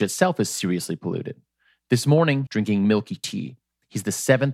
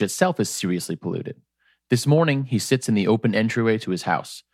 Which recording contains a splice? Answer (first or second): first